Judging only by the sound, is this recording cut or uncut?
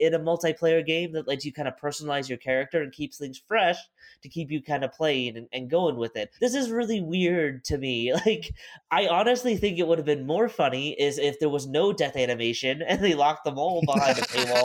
cut